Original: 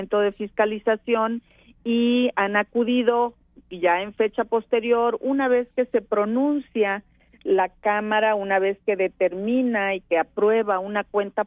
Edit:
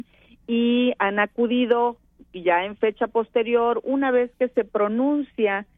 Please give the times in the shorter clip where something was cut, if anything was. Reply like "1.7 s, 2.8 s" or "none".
none